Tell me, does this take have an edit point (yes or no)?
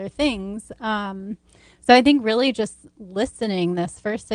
no